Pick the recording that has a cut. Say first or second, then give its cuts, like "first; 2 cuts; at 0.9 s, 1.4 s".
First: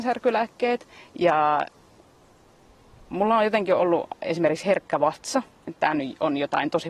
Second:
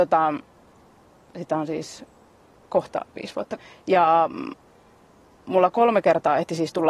first; 1 cut; at 5.7 s